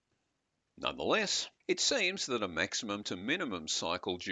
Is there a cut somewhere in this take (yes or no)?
yes